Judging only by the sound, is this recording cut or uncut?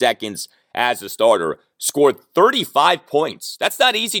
uncut